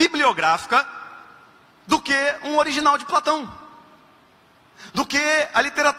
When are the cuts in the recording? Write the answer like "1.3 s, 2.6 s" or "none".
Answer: none